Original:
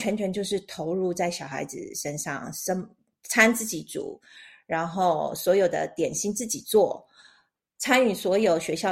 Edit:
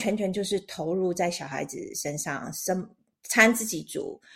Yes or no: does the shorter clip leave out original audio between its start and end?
no